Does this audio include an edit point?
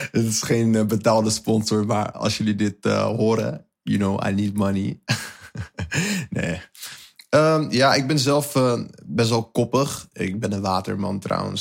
no; 0 cuts

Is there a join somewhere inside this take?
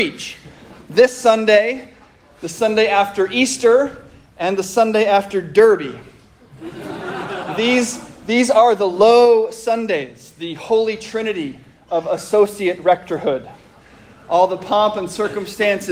no; 0 cuts

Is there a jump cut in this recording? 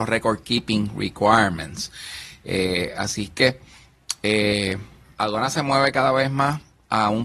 no; 0 cuts

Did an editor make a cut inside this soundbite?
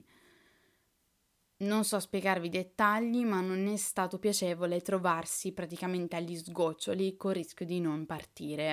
no; 0 cuts

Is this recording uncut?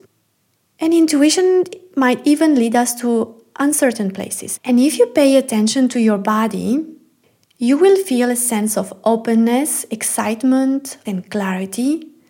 no; 2 cuts; at 4.6 s, 11.1 s

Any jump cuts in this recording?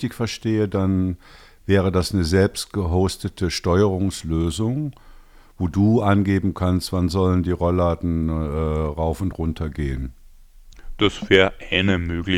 no; 0 cuts

